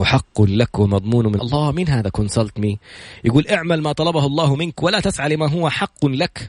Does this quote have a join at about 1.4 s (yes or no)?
yes